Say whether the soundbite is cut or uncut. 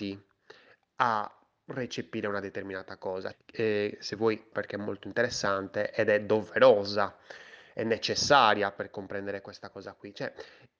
cut